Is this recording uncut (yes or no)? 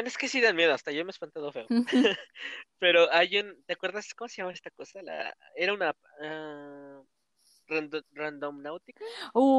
yes